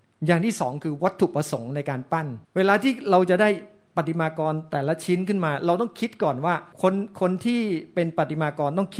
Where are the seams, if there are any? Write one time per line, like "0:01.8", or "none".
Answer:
0:02.4
0:06.7